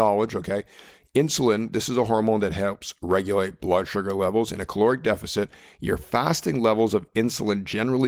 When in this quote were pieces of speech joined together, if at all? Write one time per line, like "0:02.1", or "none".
none